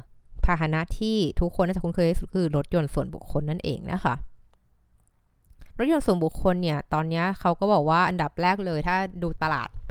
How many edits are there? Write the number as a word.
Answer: one